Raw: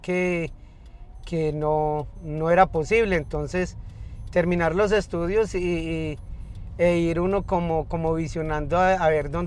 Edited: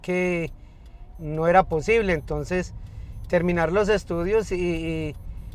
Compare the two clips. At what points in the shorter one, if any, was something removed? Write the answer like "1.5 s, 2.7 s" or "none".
1.2 s